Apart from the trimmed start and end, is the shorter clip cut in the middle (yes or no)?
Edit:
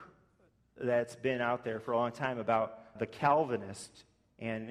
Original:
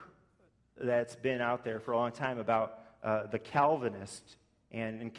yes